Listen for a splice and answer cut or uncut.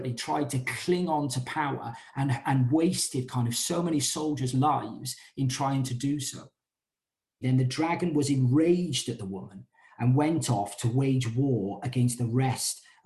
cut